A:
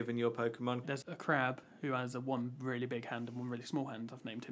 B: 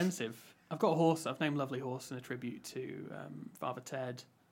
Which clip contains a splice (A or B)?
A